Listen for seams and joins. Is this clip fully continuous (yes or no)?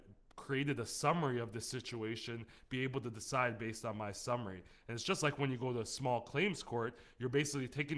yes